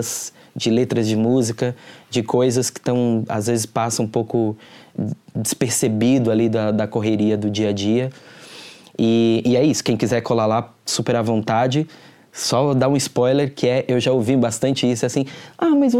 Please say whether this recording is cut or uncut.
uncut